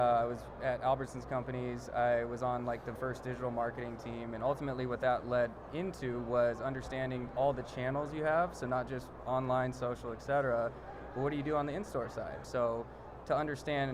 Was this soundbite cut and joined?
yes; 2 cuts; at 3.0 s, 12.4 s

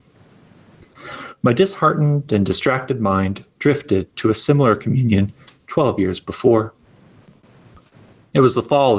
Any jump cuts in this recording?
no; 0 cuts

